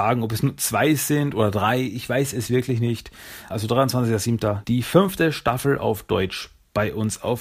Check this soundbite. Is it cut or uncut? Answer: cut